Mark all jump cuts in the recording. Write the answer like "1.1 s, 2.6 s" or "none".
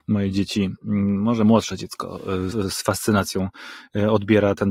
2.5 s